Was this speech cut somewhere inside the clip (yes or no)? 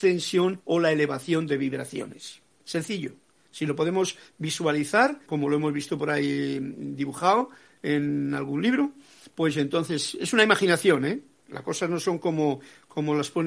yes